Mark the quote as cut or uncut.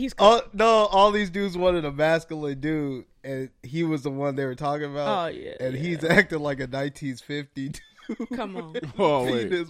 uncut